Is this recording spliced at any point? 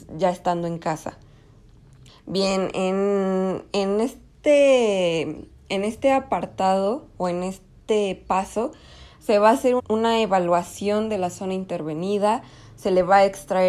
yes; 2 cuts; at 2.1 s, 9.8 s

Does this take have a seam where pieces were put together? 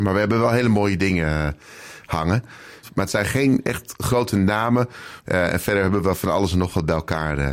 yes; 2 cuts; at 2.8 s, 5.2 s

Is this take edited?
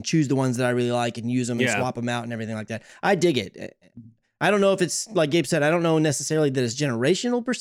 no; 0 cuts

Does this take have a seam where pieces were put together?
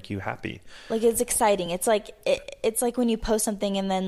no; 0 cuts

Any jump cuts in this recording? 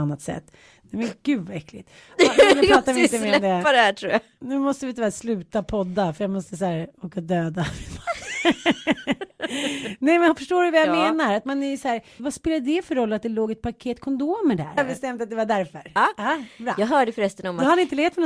yes; 2 cuts; at 12.2 s, 14.8 s

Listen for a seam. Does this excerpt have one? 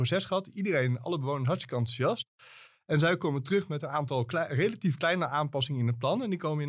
no; 0 cuts

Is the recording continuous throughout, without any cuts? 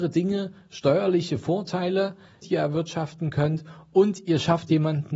no; 1 cut; at 2.4 s

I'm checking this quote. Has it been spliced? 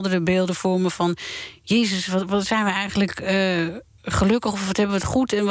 no; 0 cuts

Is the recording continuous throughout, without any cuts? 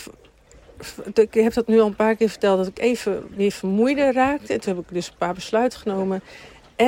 yes; 0 cuts

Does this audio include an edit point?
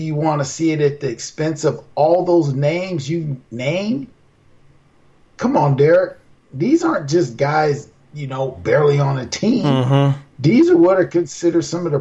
no; 0 cuts

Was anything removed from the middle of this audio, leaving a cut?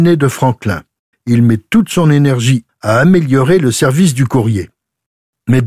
yes; 2 cuts; at 1.1 s, 2.7 s

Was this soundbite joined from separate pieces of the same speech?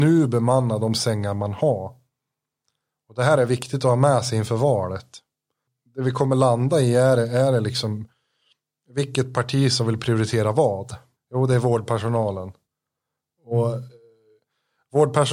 yes; 1 cut; at 11.2 s

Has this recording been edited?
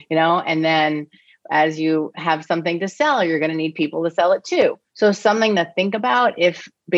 yes; 1 cut; at 4.9 s

